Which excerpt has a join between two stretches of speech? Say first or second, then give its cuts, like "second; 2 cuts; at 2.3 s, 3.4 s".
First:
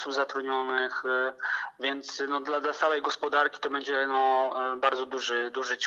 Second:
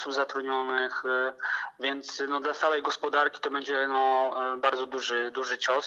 second; 1 cut; at 2.4 s